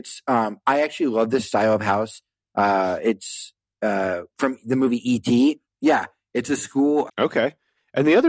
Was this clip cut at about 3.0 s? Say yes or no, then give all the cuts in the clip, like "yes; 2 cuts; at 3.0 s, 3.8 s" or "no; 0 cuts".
no; 2 cuts; at 5.6 s, 7.1 s